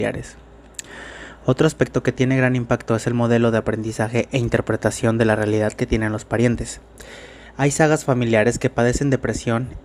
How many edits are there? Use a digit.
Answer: 0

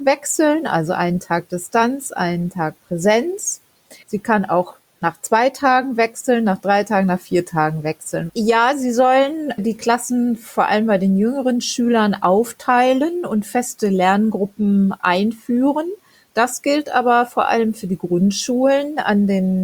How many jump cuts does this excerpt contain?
2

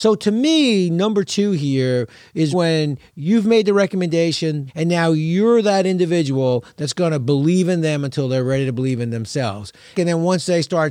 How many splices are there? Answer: 3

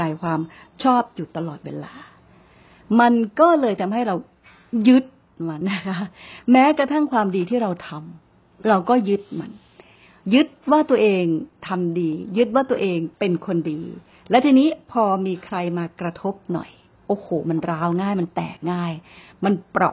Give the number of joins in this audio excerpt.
2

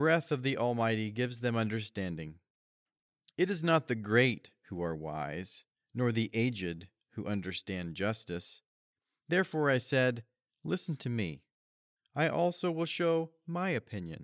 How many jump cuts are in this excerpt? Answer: 0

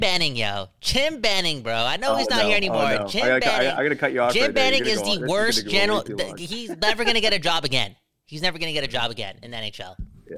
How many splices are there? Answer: 0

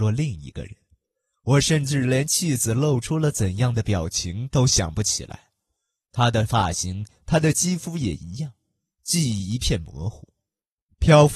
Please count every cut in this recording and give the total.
0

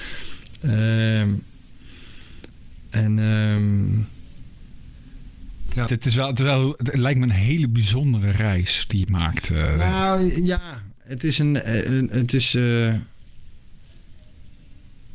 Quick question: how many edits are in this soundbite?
1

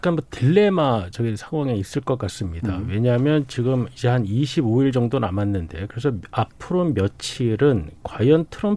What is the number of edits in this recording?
0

